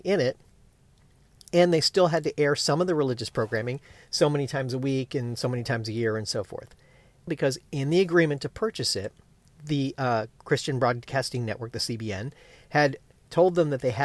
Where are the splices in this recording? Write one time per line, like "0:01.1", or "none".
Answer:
0:07.3